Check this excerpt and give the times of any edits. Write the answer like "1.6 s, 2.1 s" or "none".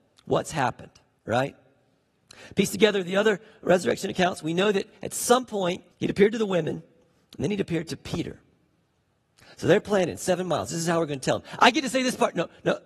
5.9 s